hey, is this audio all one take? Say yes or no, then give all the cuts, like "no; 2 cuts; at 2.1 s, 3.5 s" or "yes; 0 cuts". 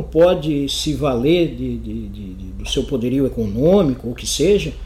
yes; 0 cuts